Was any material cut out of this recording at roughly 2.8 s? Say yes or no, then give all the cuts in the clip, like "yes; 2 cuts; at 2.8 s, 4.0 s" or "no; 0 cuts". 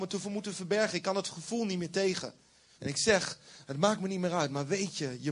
yes; 1 cut; at 2.8 s